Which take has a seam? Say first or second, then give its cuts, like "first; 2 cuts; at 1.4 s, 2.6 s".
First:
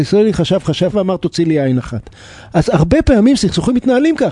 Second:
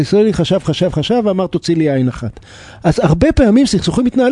first; 1 cut; at 0.9 s